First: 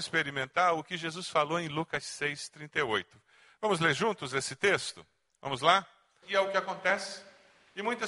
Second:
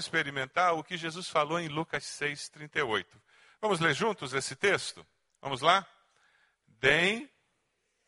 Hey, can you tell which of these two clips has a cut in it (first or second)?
first